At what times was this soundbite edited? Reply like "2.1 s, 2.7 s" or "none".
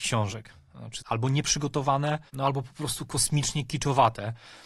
1.0 s, 2.3 s